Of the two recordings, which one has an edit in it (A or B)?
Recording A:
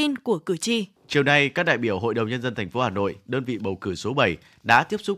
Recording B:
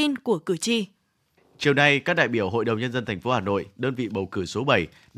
A